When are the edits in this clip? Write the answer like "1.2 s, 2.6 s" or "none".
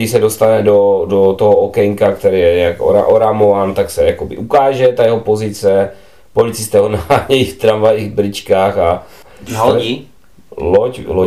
none